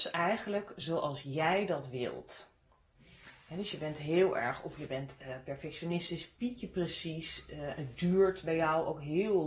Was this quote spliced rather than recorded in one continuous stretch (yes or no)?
no